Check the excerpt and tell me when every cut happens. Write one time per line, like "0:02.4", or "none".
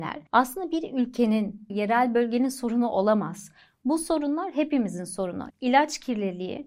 0:01.7
0:05.5